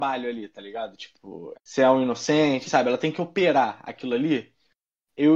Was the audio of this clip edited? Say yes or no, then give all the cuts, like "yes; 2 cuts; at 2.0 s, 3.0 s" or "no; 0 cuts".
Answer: yes; 2 cuts; at 1.5 s, 2.6 s